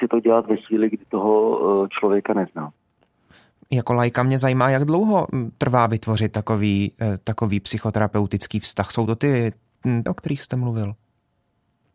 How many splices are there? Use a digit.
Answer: 1